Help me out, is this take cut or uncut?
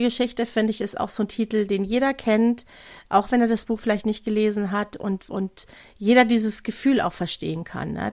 uncut